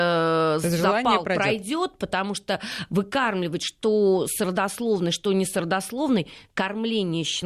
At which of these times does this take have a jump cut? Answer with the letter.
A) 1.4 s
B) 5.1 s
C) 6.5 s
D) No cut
D